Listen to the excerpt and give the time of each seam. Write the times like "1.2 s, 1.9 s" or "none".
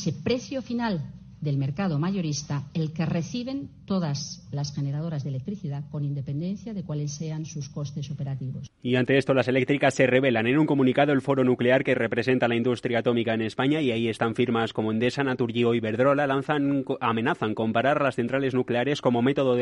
none